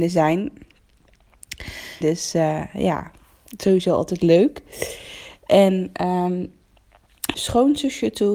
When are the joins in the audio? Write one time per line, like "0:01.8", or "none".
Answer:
0:02.0
0:07.3

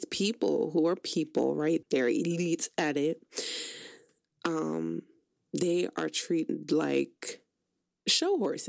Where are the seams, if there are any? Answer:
0:01.8

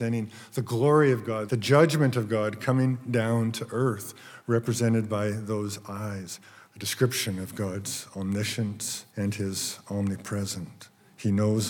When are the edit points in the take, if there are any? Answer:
0:01.5
0:06.7
0:09.1

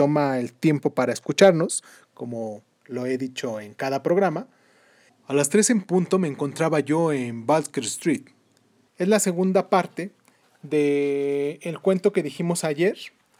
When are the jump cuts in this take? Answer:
0:05.1
0:08.9

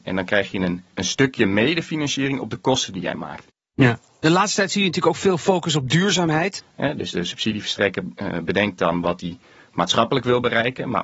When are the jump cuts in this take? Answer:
0:00.9
0:06.6

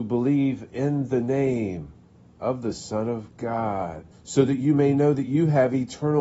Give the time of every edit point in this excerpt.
0:04.1

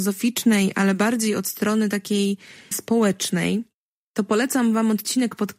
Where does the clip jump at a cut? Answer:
0:02.7

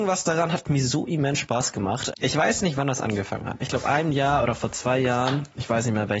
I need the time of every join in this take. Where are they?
0:02.1
0:03.6

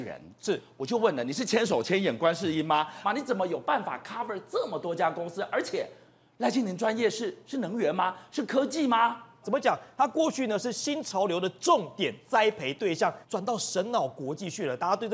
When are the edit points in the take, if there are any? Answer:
0:03.0
0:09.4
0:13.2

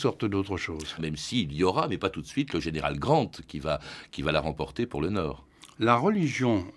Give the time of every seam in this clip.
0:01.0

